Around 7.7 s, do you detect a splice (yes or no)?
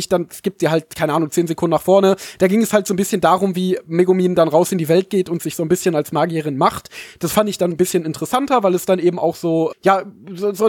yes